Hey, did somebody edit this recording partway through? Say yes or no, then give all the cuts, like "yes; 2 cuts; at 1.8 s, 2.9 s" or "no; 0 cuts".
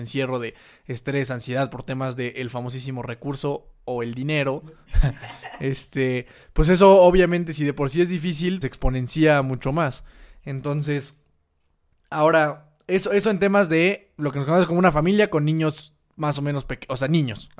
yes; 1 cut; at 8.6 s